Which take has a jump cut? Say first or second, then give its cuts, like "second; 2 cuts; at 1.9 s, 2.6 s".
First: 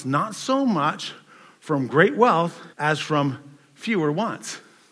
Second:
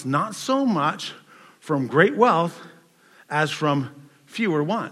first; 1 cut; at 2.7 s